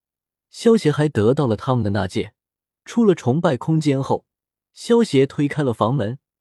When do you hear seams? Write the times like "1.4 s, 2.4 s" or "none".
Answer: 2.7 s

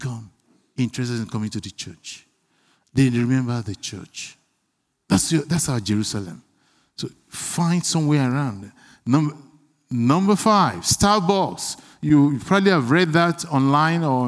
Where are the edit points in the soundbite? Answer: none

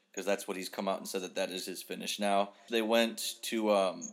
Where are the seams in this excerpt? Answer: 2.7 s

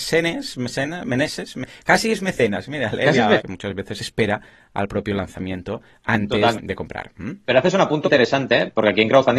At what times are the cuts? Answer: 3.4 s, 6.6 s, 8.0 s

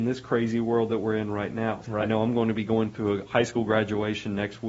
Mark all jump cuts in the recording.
1.8 s

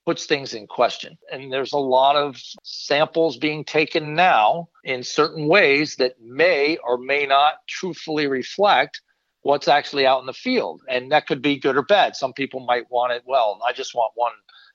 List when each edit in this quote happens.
none

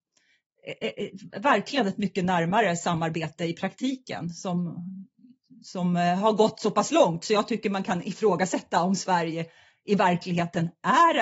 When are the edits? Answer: none

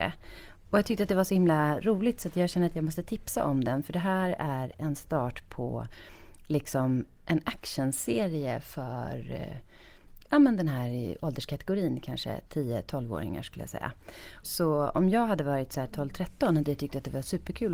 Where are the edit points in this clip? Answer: 14.4 s

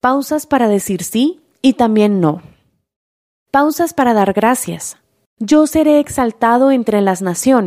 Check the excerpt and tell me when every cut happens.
5.3 s

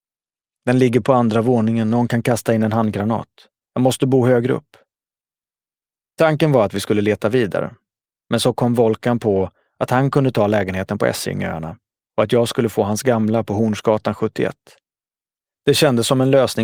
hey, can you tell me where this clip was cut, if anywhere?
none

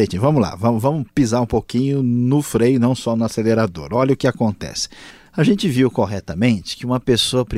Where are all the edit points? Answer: none

